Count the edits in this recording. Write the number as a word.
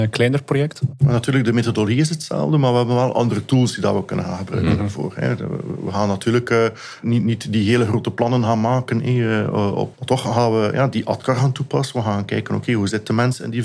one